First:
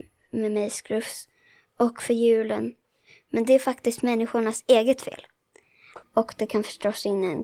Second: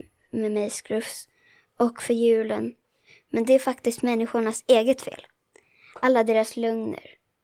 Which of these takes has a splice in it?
first; 1 cut; at 6.0 s

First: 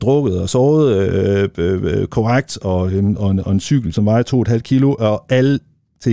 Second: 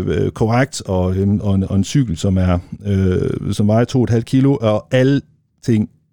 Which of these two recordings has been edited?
first; 1 cut; at 3.9 s

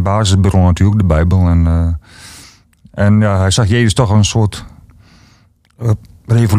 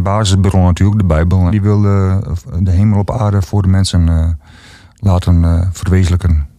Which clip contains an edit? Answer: second; 1 cut; at 1.5 s

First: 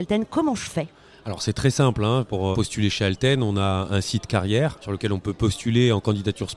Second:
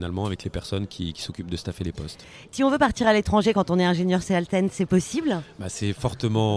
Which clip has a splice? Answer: first; 2 cuts; at 2.5 s, 4.8 s

